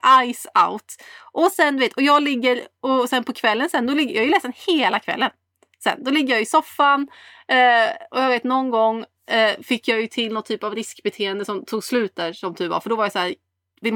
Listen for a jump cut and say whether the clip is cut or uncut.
uncut